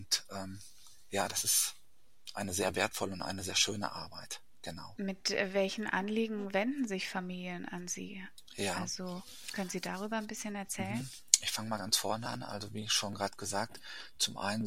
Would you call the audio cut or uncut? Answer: cut